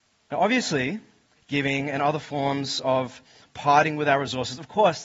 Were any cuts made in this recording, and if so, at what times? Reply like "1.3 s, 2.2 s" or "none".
1.4 s